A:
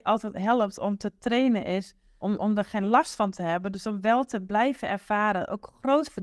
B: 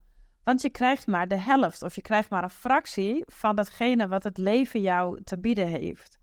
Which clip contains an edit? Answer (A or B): A